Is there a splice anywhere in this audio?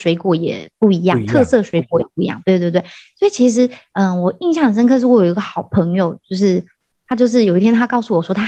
no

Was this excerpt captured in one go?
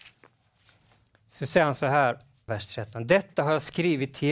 no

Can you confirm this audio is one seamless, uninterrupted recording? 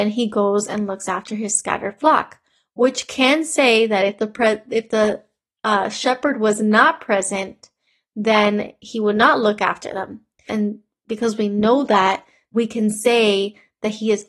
no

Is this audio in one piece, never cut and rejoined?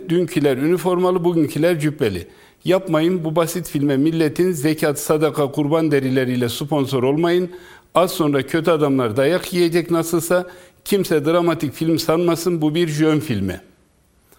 yes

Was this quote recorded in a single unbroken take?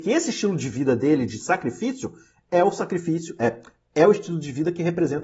yes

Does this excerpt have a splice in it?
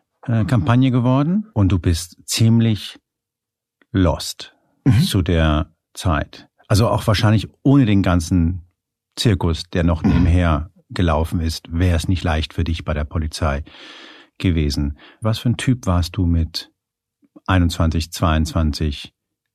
no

